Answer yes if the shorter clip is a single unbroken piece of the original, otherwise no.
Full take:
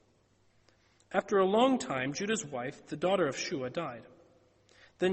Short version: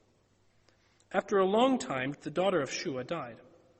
no